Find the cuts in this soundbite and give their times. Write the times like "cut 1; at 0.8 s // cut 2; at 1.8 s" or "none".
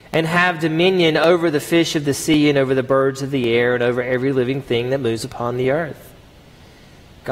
none